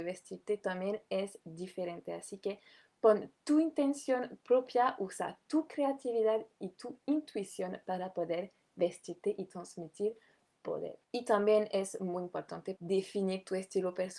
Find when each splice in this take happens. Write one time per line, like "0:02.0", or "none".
0:11.0
0:12.8